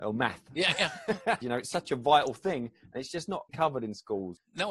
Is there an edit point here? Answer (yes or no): yes